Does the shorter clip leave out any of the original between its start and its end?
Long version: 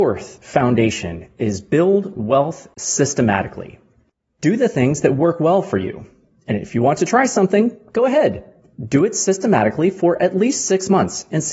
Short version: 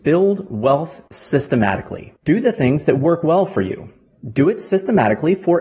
yes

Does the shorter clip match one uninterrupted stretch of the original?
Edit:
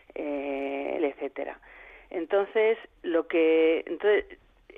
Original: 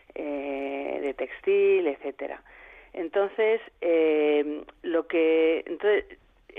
no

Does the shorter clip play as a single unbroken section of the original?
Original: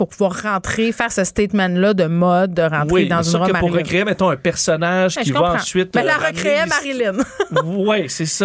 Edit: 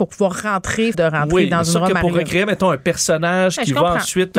no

